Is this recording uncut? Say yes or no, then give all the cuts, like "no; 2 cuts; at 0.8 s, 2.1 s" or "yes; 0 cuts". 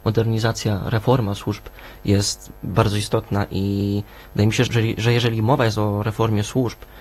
no; 1 cut; at 4.7 s